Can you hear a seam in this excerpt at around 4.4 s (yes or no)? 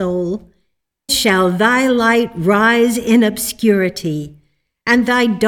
no